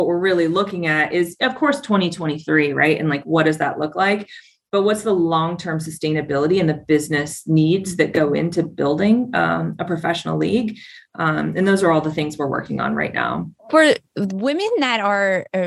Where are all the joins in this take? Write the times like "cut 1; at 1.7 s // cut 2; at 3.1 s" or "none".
cut 1; at 13.6 s